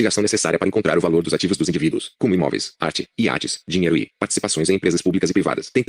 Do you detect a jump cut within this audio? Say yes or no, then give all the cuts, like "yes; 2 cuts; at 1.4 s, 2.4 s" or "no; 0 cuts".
yes; 1 cut; at 4.1 s